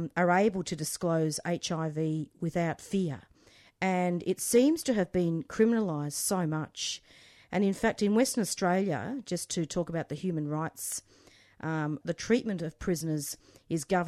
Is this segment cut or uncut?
cut